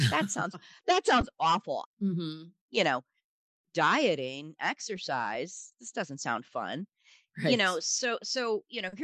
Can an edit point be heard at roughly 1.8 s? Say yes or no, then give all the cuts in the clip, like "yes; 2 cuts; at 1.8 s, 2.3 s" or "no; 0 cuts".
yes; 1 cut; at 1.8 s